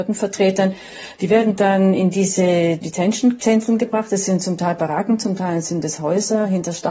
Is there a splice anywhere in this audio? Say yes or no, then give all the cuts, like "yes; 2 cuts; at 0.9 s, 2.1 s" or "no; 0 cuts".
yes; 1 cut; at 1.1 s